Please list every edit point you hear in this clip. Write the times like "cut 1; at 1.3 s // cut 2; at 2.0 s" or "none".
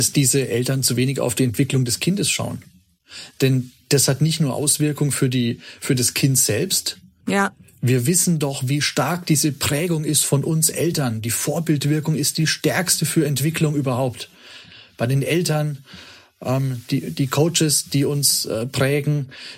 cut 1; at 7.2 s